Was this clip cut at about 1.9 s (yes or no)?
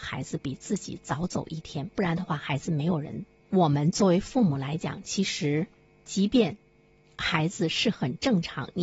no